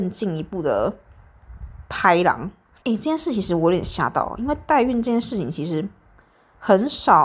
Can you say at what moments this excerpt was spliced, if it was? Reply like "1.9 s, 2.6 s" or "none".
2.8 s